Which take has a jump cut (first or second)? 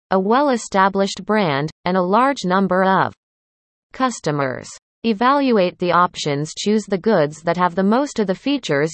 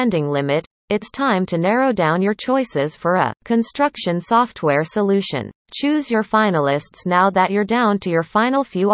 second